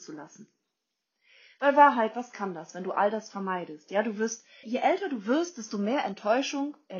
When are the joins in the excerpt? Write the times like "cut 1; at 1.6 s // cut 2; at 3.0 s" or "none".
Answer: cut 1; at 4.6 s